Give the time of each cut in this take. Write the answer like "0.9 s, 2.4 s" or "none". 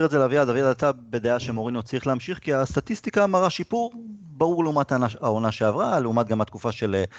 none